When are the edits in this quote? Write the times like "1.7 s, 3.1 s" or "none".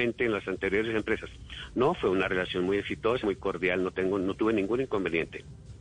3.2 s